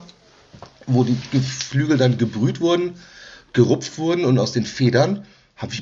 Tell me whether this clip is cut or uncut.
uncut